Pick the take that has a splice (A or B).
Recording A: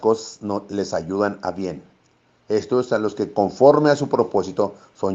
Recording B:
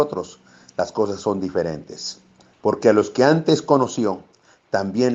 B